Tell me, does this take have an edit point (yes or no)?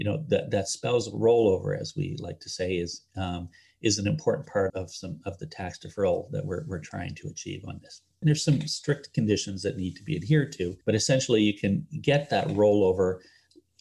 yes